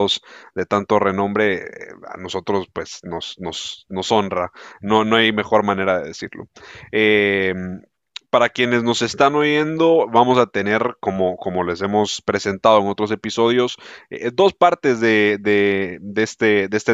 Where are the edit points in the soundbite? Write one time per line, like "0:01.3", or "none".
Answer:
none